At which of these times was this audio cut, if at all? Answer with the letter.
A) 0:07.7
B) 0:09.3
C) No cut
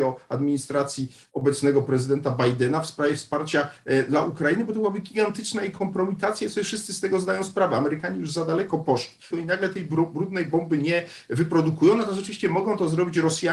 B